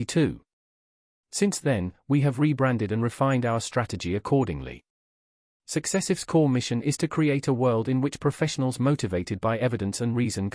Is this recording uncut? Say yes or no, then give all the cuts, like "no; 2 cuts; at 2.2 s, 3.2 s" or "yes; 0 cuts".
yes; 0 cuts